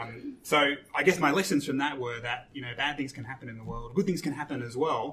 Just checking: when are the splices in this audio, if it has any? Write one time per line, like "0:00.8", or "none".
none